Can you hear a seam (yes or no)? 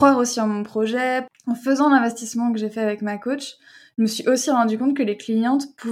no